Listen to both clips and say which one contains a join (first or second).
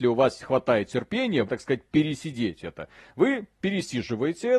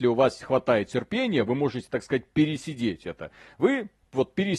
first